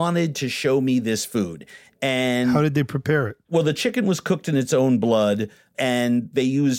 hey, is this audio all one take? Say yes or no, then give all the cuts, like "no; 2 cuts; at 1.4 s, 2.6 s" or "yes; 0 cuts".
yes; 0 cuts